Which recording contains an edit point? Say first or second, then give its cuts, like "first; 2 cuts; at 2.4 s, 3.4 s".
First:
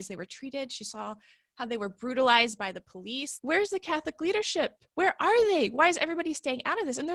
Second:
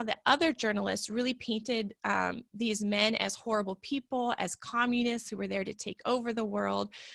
first; 2 cuts; at 3.4 s, 4.9 s